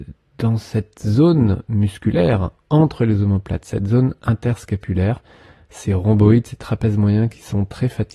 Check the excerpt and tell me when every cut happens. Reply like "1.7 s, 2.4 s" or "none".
none